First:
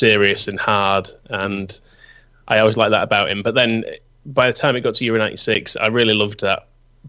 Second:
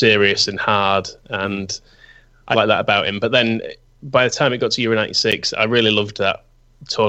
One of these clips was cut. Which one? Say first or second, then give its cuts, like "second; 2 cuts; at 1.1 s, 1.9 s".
second; 1 cut; at 2.5 s